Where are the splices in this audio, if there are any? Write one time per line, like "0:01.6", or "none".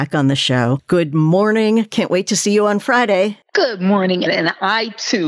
0:04.3